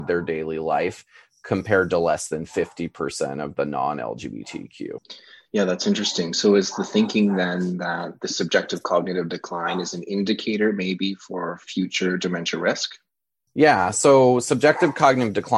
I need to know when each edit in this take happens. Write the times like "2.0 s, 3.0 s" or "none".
13.5 s